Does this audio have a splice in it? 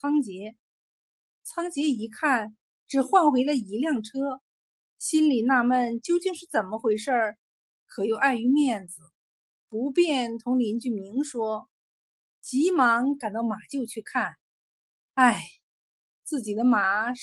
no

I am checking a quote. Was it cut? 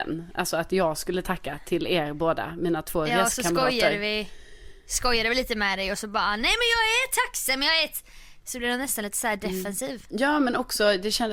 no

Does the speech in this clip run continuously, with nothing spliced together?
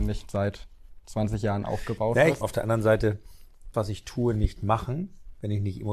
no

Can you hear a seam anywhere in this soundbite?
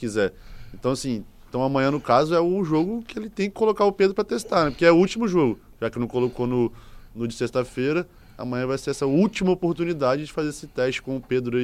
no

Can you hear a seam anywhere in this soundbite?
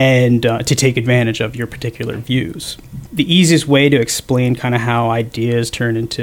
yes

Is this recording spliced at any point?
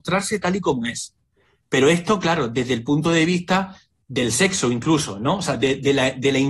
no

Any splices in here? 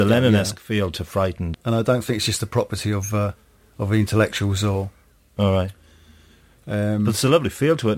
yes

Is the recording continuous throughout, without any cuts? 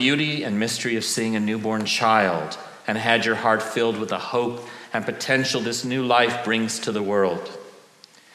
yes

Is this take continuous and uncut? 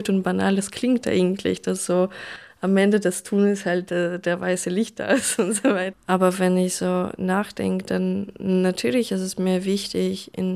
no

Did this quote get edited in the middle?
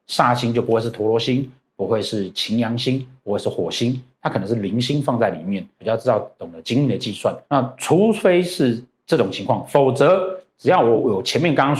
no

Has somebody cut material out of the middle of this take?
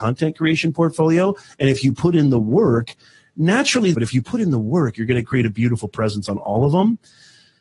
yes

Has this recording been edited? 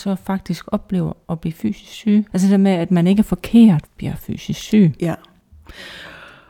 yes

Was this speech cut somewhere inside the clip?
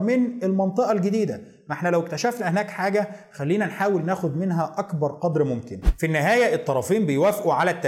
no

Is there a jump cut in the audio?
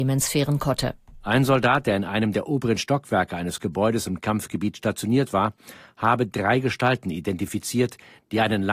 no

